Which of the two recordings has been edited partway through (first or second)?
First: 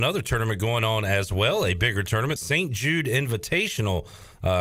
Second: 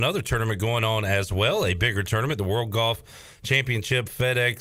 first